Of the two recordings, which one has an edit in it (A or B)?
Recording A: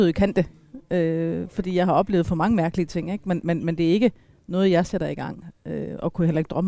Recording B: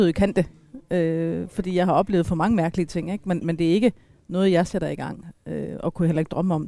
B